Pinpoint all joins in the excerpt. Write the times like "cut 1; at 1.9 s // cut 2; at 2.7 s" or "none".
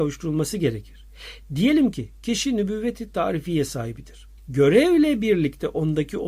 cut 1; at 4.4 s